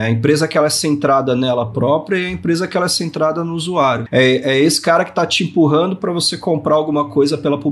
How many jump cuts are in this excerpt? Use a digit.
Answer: 1